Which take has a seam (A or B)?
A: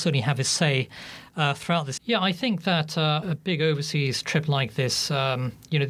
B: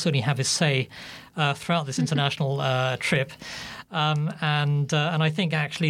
A